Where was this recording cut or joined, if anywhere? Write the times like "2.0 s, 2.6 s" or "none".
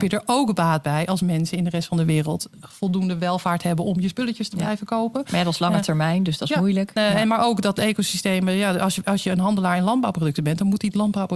7.0 s